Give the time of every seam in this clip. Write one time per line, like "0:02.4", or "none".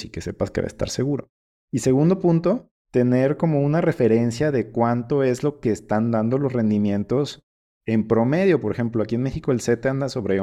0:02.8